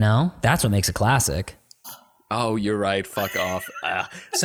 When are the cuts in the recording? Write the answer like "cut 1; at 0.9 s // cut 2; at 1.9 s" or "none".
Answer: cut 1; at 1.8 s